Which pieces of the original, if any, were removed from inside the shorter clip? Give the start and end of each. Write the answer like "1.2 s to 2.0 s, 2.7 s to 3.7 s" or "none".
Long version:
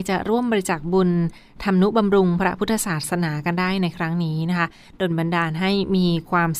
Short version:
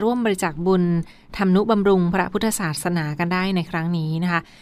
none